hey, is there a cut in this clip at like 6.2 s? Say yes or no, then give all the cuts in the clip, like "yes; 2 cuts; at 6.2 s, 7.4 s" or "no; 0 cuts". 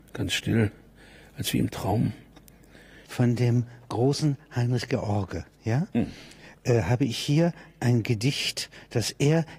no; 1 cut; at 3.0 s